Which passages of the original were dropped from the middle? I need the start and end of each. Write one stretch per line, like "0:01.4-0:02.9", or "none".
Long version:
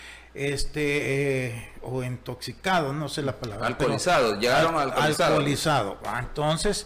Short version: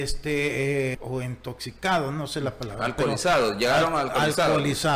0:01.5-0:01.8